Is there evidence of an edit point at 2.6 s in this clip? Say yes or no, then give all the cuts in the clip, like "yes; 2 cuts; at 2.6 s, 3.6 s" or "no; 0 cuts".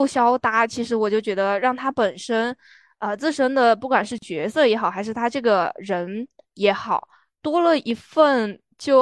no; 0 cuts